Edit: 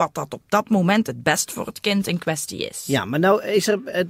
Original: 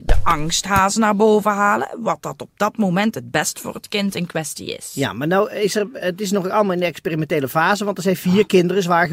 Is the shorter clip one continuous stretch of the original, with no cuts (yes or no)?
yes